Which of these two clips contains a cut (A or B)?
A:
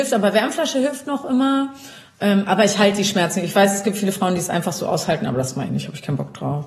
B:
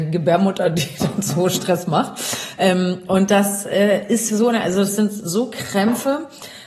B